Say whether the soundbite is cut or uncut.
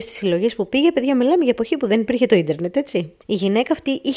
cut